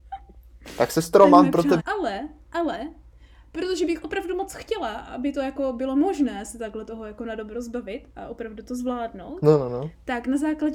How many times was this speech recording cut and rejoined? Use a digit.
1